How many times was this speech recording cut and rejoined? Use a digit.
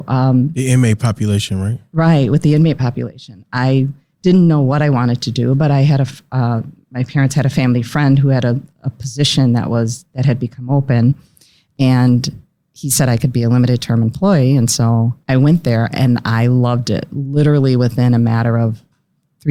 1